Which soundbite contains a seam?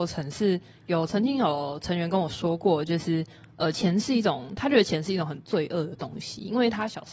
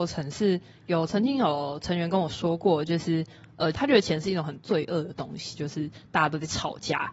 second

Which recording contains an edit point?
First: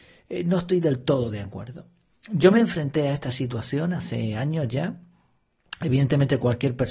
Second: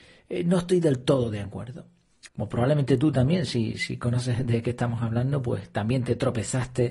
second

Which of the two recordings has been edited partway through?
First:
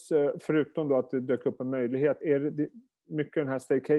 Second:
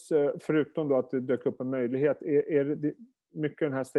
first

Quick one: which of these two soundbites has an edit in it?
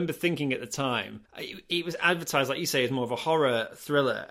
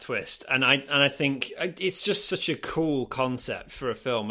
first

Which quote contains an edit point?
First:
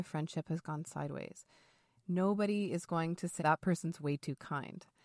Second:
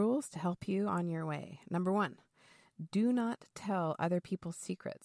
first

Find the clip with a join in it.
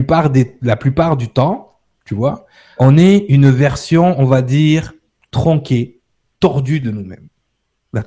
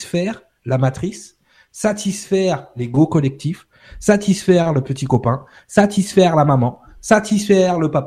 first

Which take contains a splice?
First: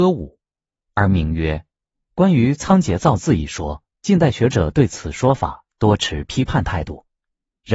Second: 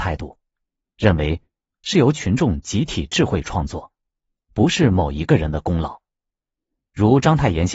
first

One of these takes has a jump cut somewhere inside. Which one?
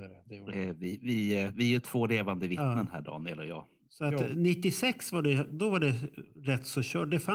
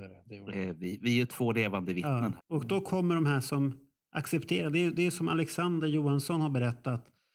second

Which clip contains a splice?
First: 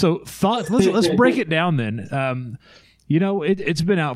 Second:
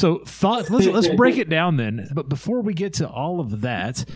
second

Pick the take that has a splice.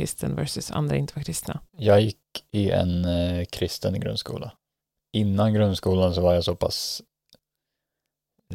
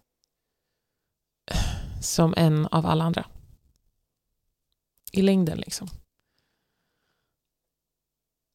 first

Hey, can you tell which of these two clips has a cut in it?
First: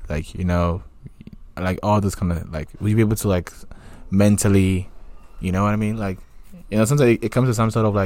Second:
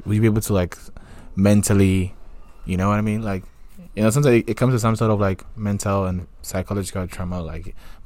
first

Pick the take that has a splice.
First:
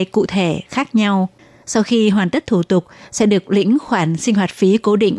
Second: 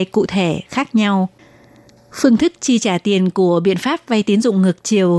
first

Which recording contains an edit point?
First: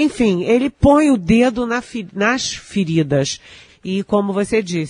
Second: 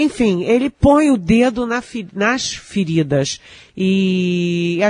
first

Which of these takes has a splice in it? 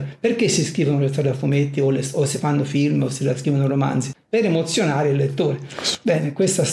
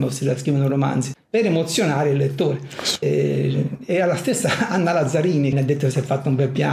second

